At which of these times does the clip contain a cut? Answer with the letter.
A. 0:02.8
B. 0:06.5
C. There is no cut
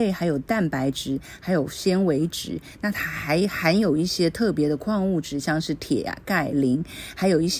C